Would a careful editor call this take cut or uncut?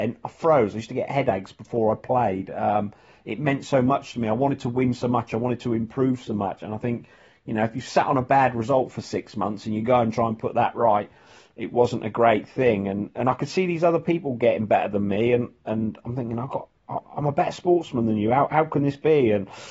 uncut